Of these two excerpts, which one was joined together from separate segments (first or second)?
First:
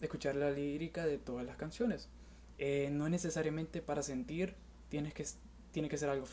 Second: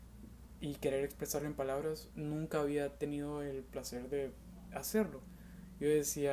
first